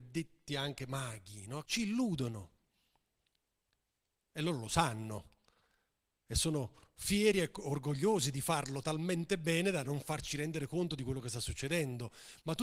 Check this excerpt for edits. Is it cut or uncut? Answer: cut